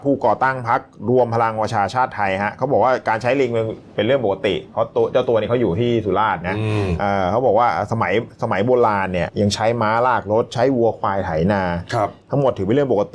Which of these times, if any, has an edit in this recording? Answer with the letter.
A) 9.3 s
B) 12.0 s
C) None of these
A